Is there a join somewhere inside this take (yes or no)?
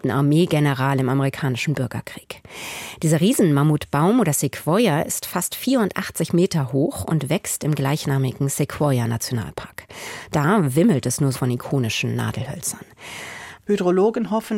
yes